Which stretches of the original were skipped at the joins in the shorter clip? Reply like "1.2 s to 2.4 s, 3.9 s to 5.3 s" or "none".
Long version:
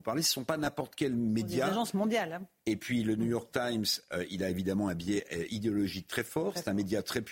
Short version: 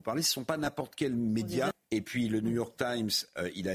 1.7 s to 2.5 s